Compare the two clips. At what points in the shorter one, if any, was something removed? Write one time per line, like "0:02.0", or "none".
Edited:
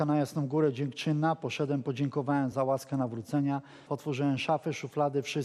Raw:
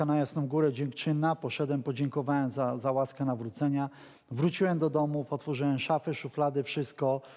0:02.5
0:03.9